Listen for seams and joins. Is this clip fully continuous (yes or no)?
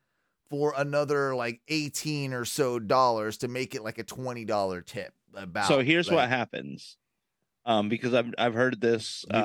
yes